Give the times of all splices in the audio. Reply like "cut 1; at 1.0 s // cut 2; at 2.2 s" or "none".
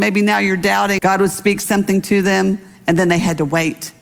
cut 1; at 1.0 s